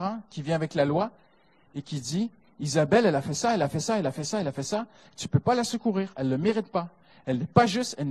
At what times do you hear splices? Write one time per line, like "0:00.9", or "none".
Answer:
none